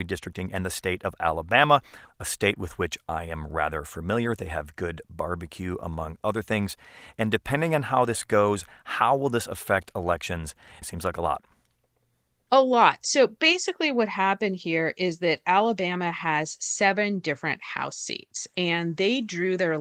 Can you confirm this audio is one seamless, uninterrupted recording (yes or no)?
no